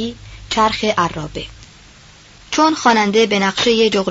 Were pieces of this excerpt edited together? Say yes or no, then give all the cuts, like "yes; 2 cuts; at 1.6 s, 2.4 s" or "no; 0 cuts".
no; 0 cuts